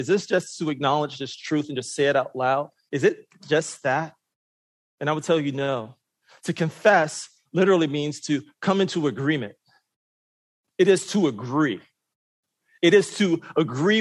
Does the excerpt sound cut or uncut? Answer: uncut